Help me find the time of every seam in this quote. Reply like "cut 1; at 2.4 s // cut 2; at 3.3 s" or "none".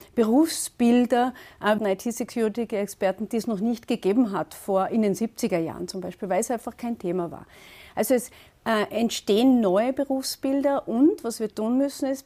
cut 1; at 1.8 s